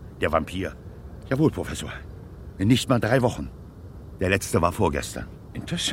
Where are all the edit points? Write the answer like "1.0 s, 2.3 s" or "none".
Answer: 1.2 s